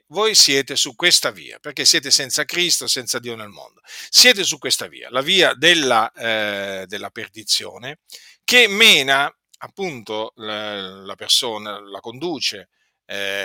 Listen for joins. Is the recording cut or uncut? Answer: uncut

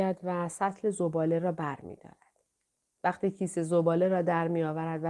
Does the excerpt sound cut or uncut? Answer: uncut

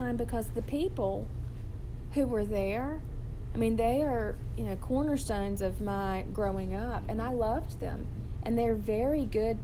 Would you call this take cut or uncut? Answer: uncut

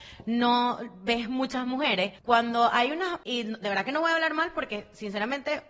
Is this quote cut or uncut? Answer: cut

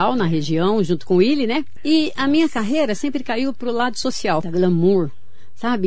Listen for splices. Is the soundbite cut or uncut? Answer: cut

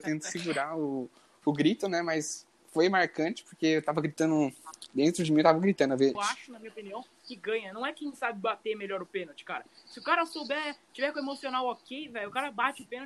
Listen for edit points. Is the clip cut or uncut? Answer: cut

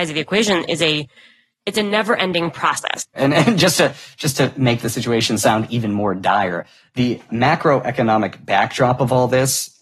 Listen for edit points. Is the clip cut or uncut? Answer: cut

